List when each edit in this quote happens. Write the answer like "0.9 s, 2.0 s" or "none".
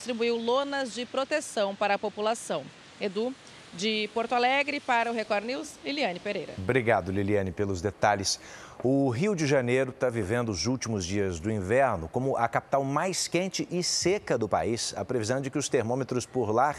none